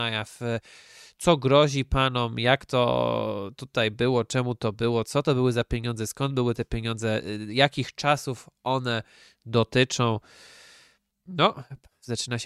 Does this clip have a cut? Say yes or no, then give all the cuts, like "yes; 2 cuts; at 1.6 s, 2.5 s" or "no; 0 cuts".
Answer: yes; 1 cut; at 11.1 s